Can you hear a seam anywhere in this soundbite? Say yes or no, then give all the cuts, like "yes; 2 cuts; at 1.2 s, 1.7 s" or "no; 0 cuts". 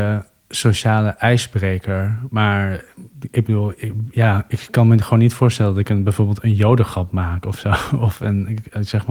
no; 0 cuts